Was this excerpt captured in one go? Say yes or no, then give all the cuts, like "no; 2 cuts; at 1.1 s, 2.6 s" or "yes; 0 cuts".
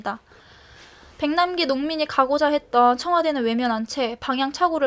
yes; 0 cuts